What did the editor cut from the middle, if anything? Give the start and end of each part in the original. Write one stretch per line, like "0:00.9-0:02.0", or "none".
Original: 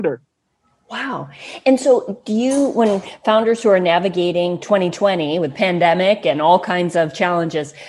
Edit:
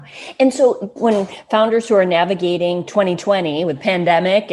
0:02.2-0:02.7

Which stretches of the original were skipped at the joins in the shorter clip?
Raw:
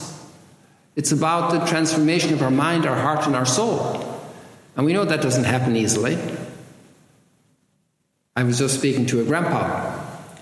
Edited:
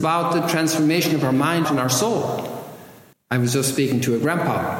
0:02.8-0:03.2
0:04.7-0:08.2

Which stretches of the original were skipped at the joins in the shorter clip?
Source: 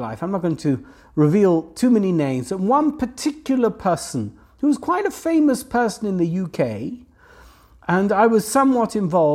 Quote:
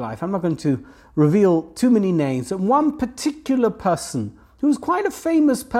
none

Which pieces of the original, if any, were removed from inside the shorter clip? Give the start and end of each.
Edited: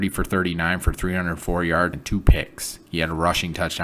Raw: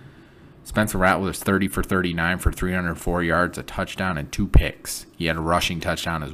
0:03.5-0:04.2

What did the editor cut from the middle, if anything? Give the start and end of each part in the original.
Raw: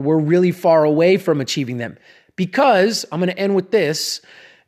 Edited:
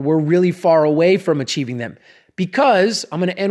none

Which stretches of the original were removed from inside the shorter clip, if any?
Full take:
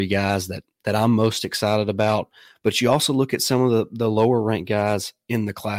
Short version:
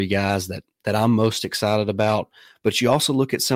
none

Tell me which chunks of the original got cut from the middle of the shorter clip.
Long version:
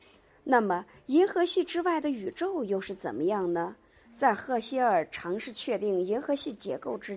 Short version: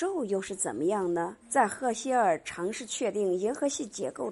0:03.8-0:04.1

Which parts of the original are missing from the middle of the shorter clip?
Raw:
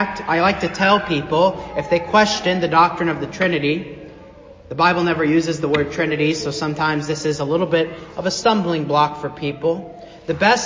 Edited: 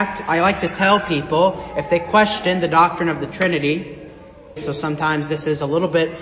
0:04.6-0:06.3

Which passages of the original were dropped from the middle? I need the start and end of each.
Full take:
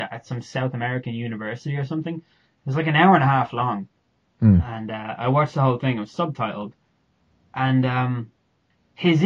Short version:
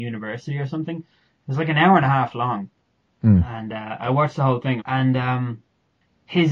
0:06.0-0:07.5

